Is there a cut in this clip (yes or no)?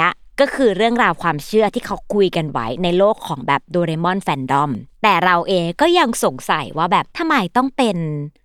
yes